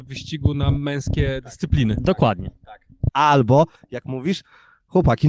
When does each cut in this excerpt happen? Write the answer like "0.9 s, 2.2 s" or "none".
3.1 s